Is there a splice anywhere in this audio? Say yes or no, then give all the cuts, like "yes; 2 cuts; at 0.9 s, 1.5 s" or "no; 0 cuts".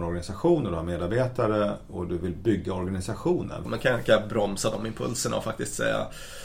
yes; 1 cut; at 3.7 s